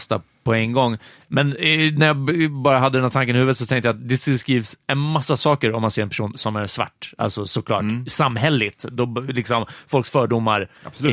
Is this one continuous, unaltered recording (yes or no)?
no